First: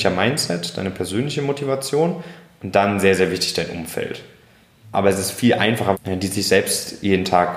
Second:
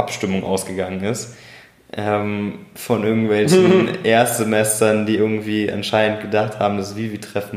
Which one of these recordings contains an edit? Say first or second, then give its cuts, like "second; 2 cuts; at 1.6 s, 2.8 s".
first; 2 cuts; at 4.8 s, 5.9 s